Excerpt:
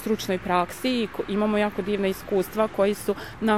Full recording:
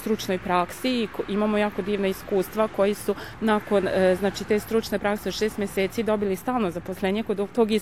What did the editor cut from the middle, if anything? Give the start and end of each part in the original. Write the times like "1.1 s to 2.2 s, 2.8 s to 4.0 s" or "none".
none

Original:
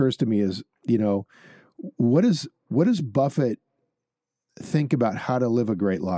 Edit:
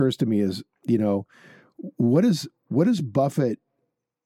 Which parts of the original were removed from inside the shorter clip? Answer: none

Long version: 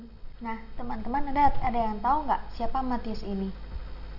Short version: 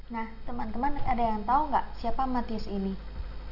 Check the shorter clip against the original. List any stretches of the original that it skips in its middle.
1.3 s to 1.5 s

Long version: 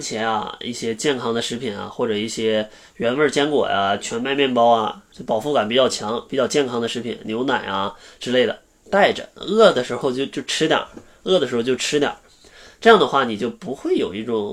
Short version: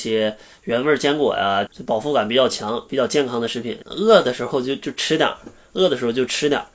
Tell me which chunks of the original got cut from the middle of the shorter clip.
4.0 s to 5.1 s, 7.2 s to 9.3 s

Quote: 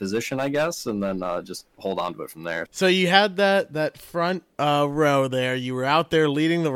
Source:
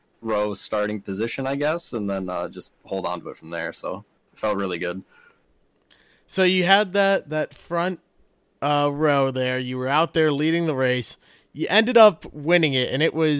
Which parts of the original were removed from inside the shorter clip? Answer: 3.7 s to 6.2 s, 8.1 s to 8.6 s

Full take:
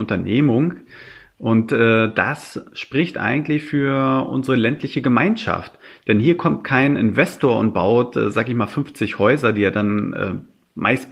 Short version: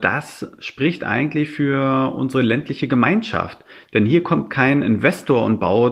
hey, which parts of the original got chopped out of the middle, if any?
none

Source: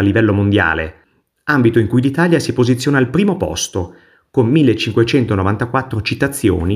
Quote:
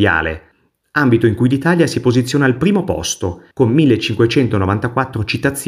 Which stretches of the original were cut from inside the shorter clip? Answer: 4.0 s to 4.3 s

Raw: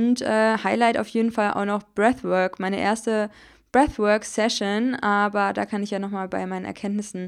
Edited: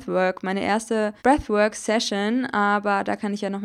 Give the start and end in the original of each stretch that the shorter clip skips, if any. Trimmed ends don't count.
3.4 s to 3.7 s

